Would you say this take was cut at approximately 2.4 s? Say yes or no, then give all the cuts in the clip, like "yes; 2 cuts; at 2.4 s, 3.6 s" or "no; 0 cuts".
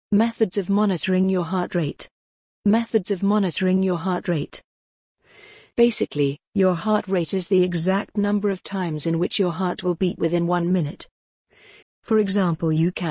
no; 1 cut; at 11.8 s